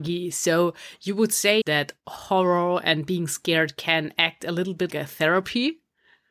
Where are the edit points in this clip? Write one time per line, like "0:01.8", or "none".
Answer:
0:01.6
0:04.9